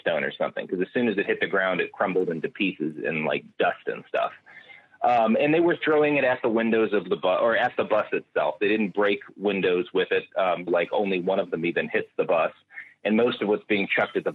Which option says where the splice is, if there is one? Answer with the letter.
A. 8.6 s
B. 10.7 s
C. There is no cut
B